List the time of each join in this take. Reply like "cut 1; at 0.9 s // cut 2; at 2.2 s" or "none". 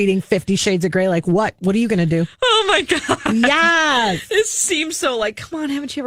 cut 1; at 4.5 s